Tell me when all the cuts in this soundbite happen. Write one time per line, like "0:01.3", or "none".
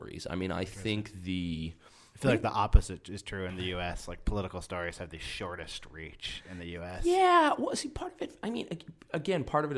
none